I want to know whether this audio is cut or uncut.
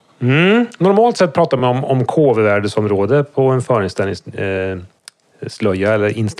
uncut